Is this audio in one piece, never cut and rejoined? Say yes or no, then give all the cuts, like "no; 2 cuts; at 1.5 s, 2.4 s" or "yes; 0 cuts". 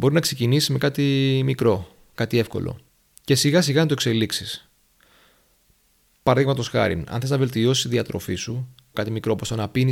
no; 1 cut; at 8.9 s